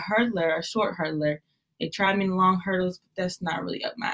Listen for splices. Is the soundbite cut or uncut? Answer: uncut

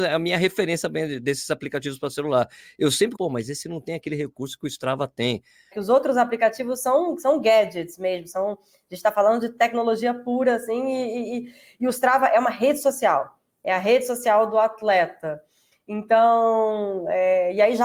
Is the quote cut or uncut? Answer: cut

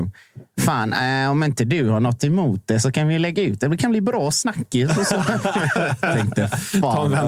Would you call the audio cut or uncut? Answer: uncut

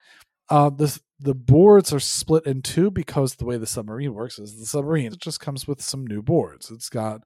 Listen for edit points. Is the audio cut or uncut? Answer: cut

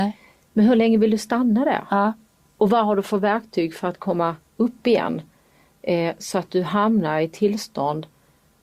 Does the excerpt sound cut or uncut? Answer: uncut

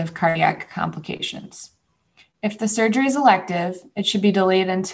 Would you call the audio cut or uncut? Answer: uncut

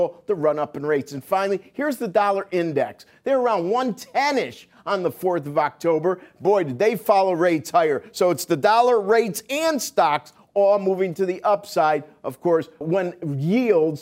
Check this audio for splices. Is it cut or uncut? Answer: cut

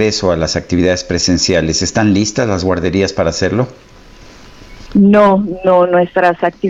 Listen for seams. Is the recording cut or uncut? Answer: cut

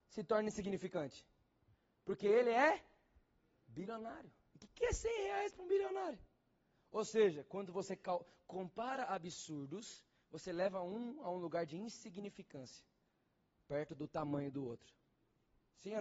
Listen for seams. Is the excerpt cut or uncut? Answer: uncut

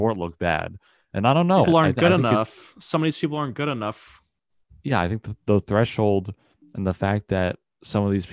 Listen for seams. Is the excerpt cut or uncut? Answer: cut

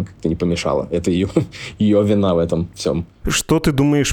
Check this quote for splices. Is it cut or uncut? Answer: cut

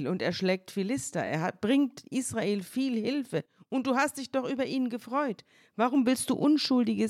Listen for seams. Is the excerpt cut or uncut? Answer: uncut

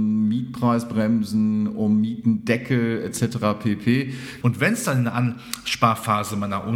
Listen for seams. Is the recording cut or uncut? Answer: cut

